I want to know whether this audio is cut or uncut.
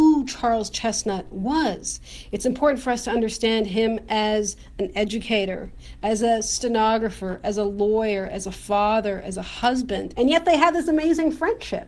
cut